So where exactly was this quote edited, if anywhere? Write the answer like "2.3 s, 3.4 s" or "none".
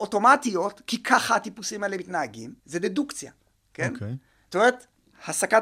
2.6 s